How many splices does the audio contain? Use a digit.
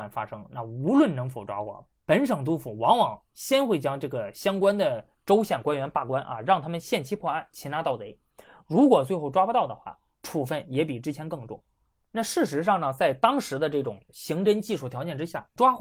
0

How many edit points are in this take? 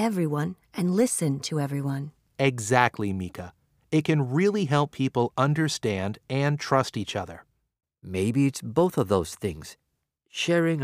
0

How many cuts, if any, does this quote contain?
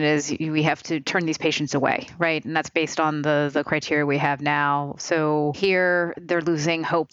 0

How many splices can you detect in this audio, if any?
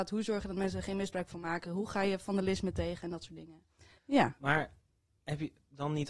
1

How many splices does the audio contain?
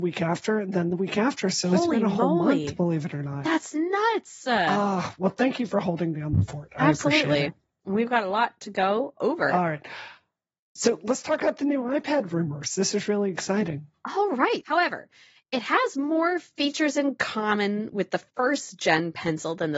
1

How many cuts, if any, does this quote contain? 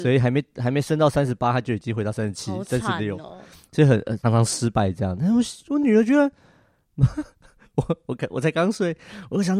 1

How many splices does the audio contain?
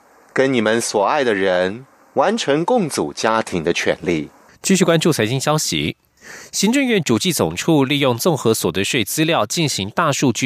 1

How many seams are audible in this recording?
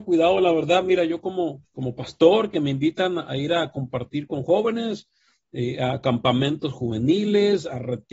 1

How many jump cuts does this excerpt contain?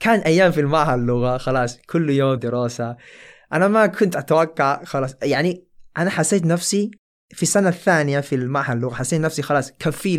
1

